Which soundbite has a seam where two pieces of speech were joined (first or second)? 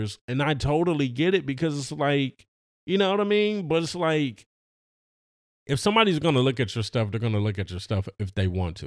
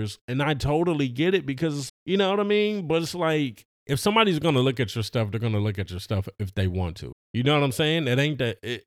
second